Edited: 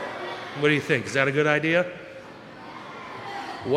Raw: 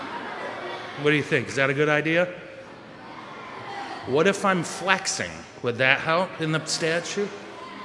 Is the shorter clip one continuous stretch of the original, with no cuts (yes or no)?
yes